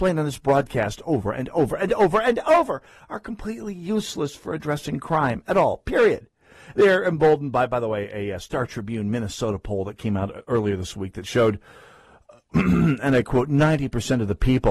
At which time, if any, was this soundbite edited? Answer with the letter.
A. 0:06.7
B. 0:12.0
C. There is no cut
A